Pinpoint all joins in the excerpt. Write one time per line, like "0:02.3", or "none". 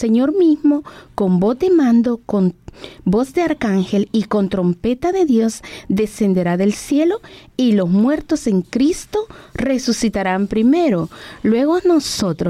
none